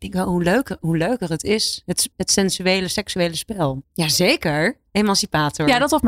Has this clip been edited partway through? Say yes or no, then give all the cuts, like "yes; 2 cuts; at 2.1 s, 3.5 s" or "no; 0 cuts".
yes; 2 cuts; at 2.1 s, 3.8 s